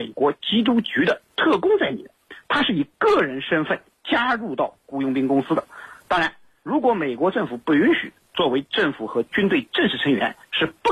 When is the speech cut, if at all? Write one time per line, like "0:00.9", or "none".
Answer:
none

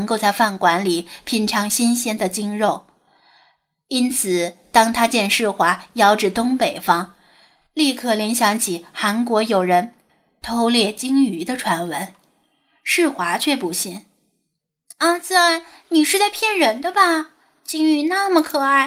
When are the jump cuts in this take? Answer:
none

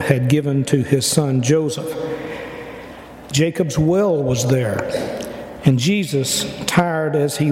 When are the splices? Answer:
none

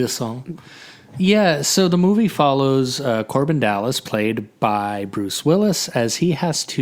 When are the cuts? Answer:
none

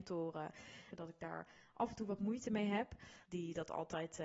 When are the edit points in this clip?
0:00.9
0:03.2

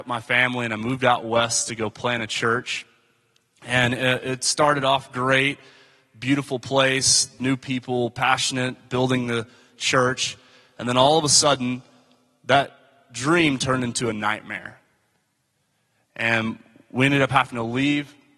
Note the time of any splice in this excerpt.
0:07.4

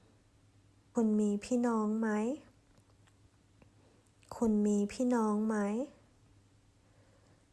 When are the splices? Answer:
0:00.9

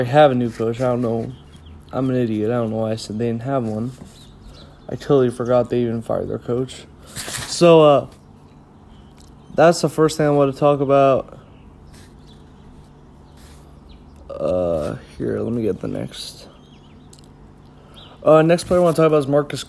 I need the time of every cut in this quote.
none

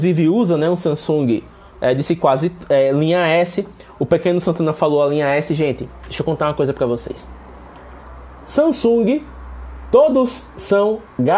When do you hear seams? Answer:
none

